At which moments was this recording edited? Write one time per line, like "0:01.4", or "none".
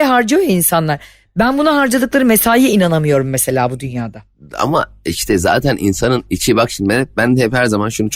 none